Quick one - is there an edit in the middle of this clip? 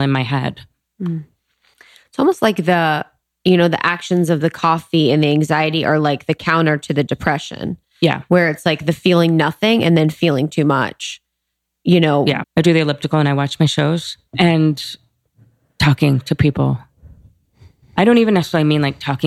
yes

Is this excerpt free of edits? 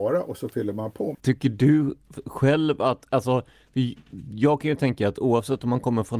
no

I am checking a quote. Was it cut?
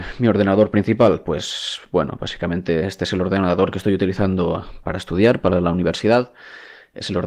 yes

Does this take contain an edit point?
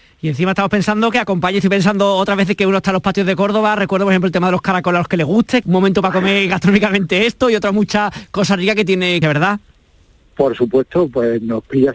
yes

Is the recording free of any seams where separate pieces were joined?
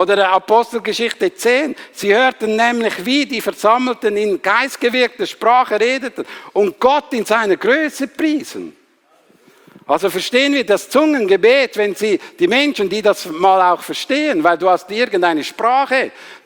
yes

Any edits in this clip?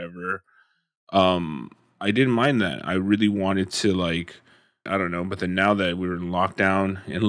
yes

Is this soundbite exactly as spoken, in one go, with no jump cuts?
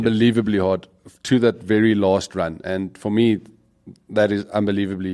yes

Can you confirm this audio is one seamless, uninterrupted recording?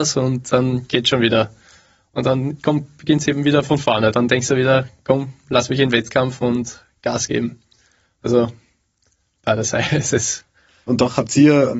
no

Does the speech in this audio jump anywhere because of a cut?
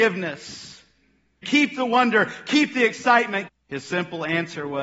yes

